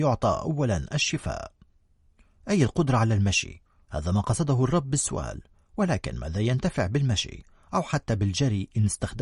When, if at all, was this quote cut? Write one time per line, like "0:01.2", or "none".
none